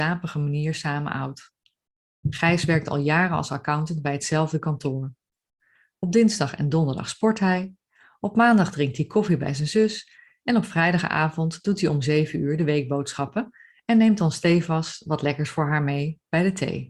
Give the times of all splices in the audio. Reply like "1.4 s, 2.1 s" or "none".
2.2 s